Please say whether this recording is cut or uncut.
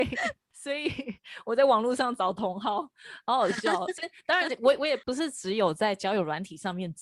uncut